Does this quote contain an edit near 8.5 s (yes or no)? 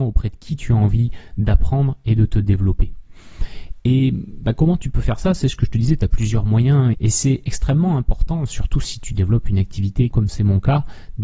no